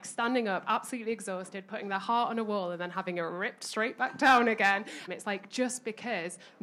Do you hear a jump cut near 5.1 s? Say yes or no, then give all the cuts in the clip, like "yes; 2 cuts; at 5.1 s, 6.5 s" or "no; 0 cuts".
yes; 1 cut; at 5.1 s